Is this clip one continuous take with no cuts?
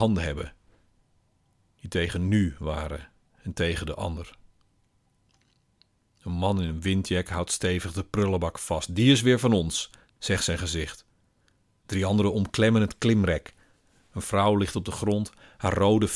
yes; 0 cuts

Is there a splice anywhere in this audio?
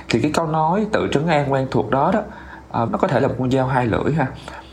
yes; 1 cut; at 2.9 s

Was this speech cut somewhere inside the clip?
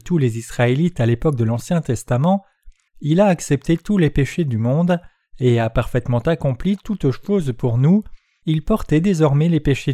yes; 2 cuts; at 2.9 s, 8.4 s

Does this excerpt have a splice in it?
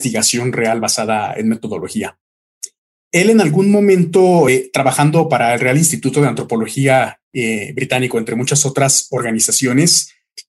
no; 0 cuts

